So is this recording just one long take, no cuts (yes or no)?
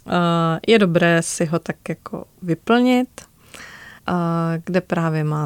no